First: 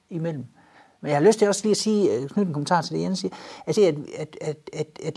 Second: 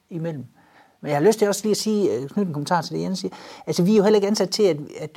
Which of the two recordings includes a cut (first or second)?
first